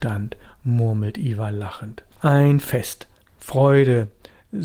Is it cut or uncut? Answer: cut